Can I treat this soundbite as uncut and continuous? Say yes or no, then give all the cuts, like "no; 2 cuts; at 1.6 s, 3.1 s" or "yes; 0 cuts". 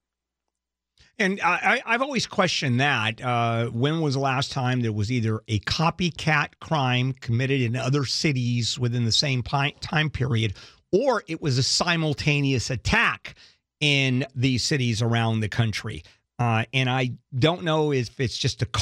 yes; 0 cuts